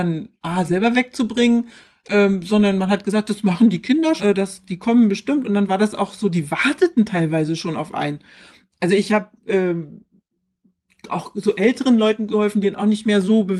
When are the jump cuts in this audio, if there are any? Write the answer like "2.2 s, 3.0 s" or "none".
4.2 s